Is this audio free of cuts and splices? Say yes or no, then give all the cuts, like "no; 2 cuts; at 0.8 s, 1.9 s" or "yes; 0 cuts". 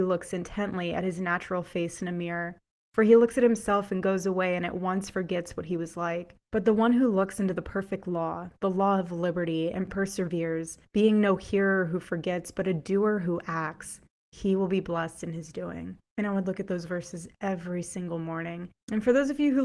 yes; 0 cuts